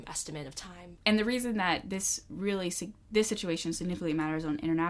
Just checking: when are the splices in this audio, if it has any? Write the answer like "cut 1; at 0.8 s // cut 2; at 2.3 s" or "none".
cut 1; at 1.0 s